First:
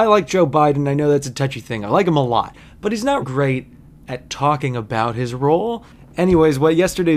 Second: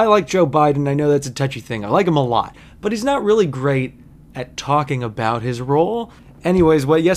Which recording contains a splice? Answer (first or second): first